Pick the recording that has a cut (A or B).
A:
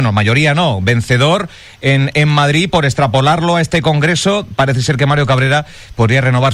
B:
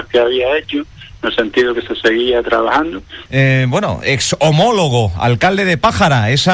B